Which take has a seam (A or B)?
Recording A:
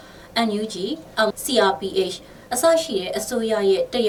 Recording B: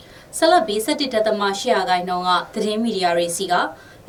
A